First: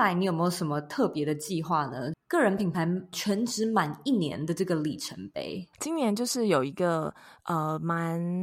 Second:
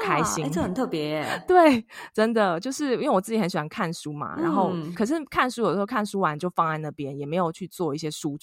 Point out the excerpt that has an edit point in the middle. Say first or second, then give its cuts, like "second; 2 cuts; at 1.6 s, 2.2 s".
first; 2 cuts; at 2.1 s, 5.7 s